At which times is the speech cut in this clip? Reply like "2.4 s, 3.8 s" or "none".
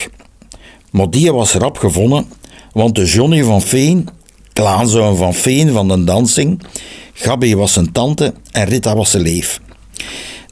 none